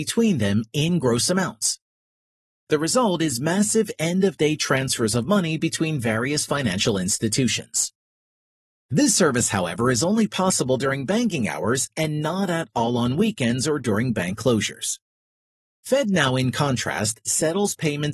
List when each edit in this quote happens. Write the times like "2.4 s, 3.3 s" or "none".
none